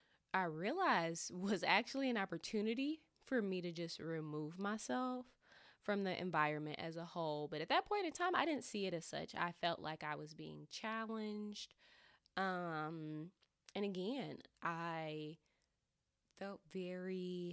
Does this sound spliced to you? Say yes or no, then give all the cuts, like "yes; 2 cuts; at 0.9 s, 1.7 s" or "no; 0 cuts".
no; 0 cuts